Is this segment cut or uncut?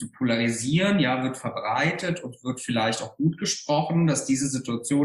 uncut